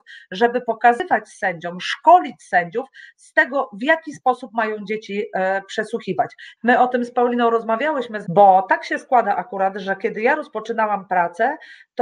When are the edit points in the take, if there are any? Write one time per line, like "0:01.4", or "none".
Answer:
0:06.6
0:08.2